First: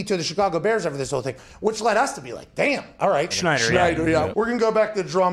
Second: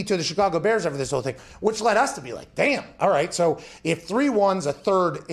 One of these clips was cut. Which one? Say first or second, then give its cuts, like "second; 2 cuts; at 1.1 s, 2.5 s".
first; 2 cuts; at 3.3 s, 4.3 s